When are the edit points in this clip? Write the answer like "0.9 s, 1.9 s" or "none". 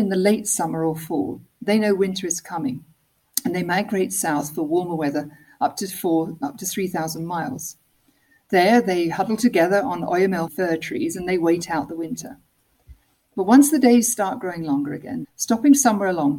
10.5 s, 15.2 s